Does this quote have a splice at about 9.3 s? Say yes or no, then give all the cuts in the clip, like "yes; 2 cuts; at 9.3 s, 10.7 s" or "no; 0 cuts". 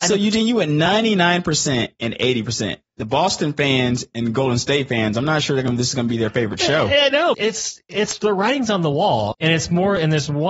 yes; 2 cuts; at 7.3 s, 9.3 s